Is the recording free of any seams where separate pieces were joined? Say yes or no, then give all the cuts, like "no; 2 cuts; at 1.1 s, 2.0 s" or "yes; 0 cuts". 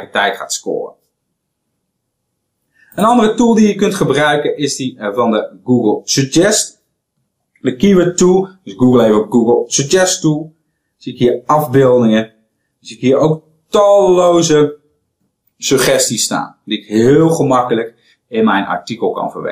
yes; 0 cuts